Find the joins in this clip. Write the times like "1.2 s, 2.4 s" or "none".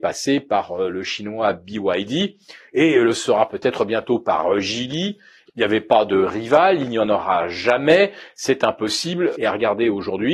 5.5 s, 9.3 s